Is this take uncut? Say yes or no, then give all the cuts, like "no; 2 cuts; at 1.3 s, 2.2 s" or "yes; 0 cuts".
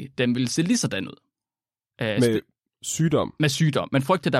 yes; 0 cuts